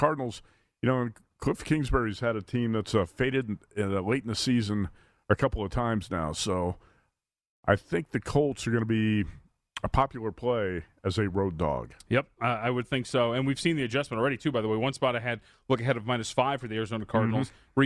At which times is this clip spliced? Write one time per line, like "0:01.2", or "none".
none